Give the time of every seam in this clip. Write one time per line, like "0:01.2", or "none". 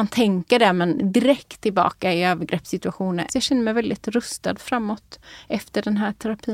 0:03.3